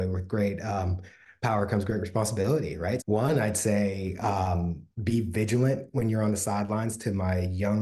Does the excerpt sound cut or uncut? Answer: cut